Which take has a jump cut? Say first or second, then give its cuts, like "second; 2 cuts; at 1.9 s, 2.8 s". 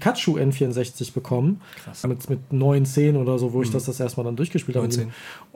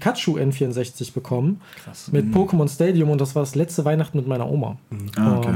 first; 1 cut; at 2.0 s